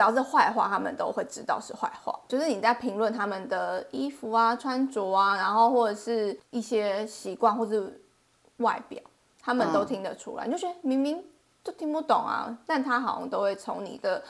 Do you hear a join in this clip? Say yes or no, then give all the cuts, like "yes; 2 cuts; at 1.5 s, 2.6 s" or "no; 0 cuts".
no; 0 cuts